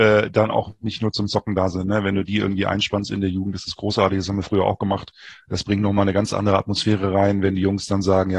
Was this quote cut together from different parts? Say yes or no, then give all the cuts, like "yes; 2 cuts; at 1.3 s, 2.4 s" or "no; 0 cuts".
no; 0 cuts